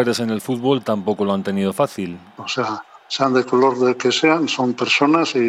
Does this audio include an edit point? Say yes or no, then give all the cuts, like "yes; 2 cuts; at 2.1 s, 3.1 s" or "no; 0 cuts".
yes; 1 cut; at 2.4 s